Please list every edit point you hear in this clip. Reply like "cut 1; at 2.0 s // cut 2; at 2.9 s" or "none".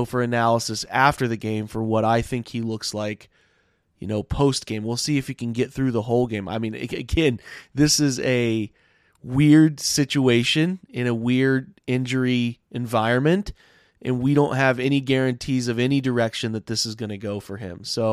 none